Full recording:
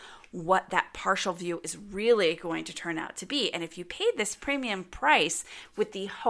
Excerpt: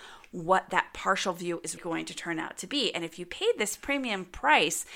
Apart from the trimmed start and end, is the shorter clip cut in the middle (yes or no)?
yes